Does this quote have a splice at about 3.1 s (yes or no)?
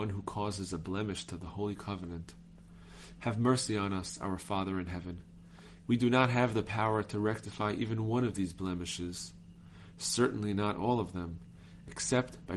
no